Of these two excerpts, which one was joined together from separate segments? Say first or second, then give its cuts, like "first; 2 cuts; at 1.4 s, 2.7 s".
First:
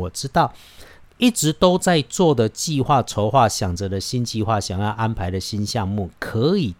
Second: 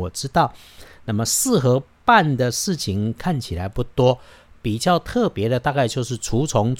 first; 1 cut; at 1.0 s